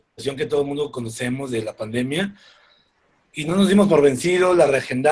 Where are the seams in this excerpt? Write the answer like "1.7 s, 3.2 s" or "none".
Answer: none